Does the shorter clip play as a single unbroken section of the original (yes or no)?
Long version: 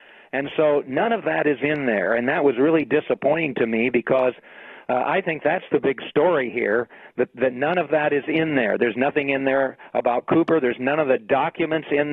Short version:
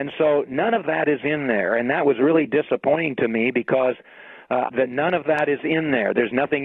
no